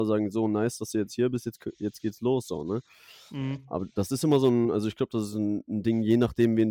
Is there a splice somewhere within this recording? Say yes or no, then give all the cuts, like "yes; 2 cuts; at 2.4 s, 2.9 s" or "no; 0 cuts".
no; 0 cuts